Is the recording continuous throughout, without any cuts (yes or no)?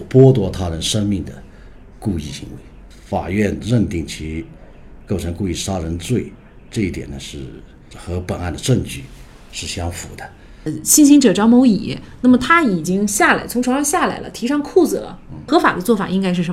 yes